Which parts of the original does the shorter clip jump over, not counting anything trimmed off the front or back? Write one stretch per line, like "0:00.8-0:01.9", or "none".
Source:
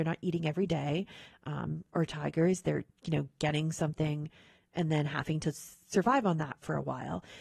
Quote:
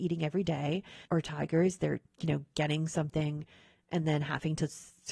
0:01.3-0:01.9